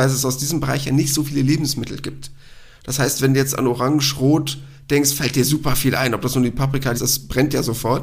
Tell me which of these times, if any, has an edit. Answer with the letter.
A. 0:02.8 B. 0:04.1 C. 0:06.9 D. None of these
C